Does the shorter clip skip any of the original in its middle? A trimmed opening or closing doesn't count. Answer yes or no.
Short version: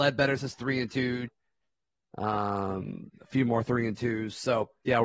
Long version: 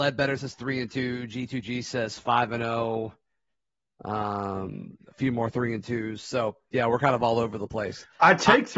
yes